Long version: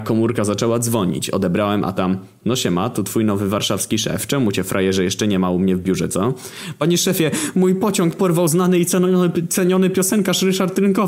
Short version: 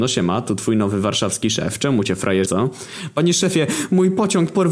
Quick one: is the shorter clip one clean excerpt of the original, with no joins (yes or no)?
no